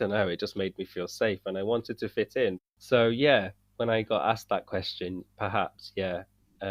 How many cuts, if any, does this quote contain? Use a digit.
1